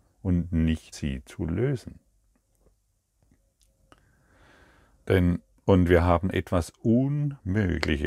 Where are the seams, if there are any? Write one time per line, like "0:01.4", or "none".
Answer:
0:00.9